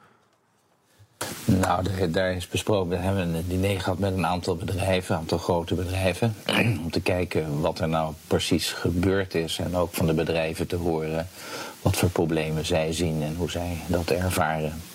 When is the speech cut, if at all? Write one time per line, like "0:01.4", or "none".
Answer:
none